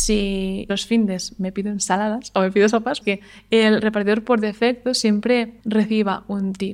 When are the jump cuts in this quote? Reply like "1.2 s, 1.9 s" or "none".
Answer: none